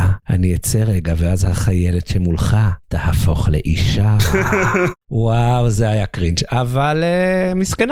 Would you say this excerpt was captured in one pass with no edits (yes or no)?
yes